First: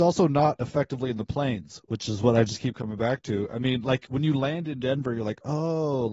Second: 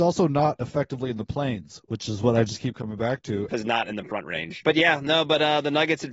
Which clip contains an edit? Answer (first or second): second